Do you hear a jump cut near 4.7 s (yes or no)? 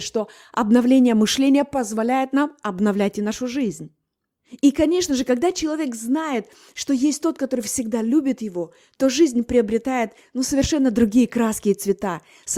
no